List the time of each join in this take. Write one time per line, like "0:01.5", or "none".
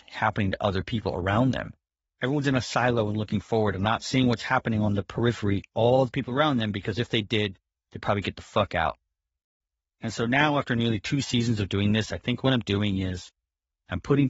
0:05.7

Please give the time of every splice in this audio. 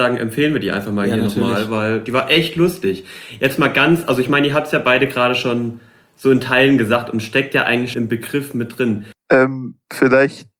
0:07.9
0:09.1

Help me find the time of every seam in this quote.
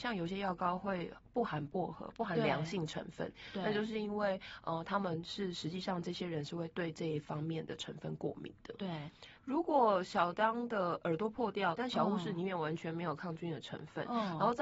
0:09.4
0:11.8

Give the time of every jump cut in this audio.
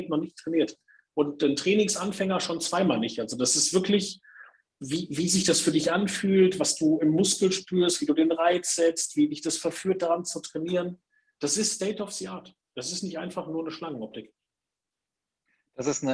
none

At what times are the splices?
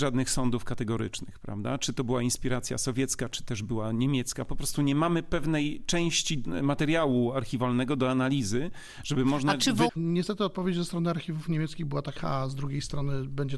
0:09.9
0:12.2

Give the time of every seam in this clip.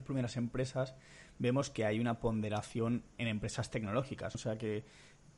0:03.1
0:04.3

